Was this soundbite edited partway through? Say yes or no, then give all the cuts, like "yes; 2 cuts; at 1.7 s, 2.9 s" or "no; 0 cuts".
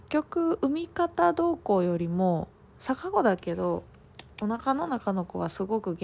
no; 0 cuts